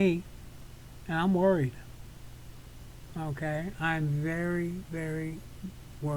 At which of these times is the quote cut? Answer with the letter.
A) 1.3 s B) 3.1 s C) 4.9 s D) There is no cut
D